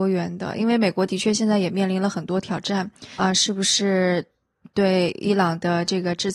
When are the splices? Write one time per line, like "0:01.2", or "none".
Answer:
0:03.2